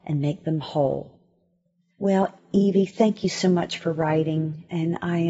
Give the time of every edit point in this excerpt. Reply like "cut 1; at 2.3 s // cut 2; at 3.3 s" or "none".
none

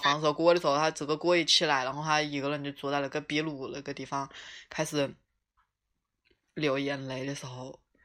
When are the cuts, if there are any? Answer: none

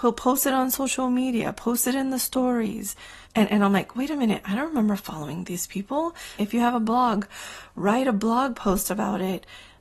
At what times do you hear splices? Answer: cut 1; at 3.2 s // cut 2; at 6.4 s

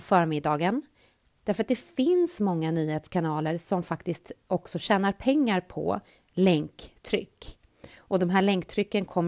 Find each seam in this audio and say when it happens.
cut 1; at 1.4 s

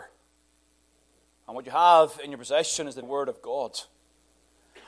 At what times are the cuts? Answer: cut 1; at 1.3 s // cut 2; at 3.0 s

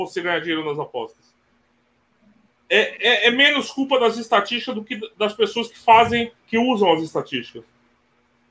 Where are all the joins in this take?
cut 1; at 2.9 s // cut 2; at 6.4 s

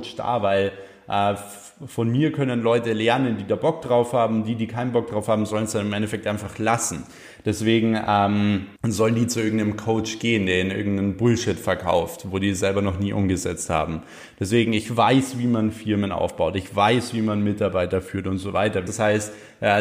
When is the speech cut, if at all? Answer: cut 1; at 8.8 s // cut 2; at 18.9 s

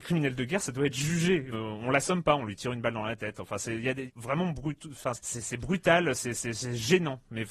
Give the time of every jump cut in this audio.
cut 1; at 1.5 s // cut 2; at 4.1 s // cut 3; at 5.1 s

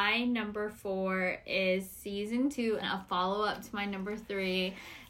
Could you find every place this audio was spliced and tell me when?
cut 1; at 2.8 s

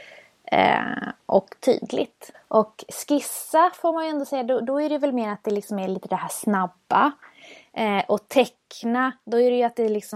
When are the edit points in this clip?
cut 1; at 2.3 s

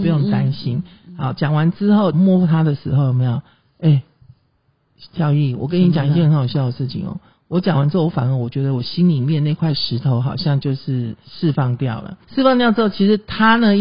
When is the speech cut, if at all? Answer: cut 1; at 2.1 s // cut 2; at 12.2 s

